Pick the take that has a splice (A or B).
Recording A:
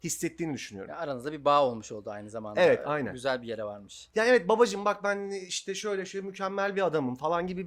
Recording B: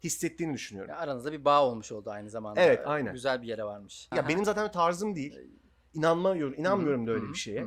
B